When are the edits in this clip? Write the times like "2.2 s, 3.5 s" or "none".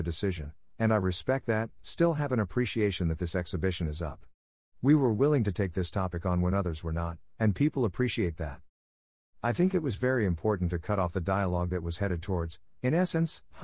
none